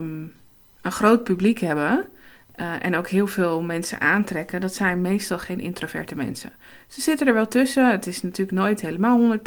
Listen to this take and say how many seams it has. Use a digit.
0